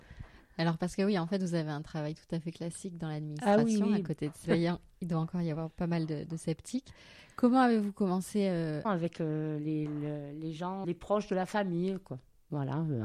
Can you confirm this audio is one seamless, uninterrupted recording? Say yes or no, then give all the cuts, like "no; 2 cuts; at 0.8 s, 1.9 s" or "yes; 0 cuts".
no; 3 cuts; at 4.5 s, 8.8 s, 10.8 s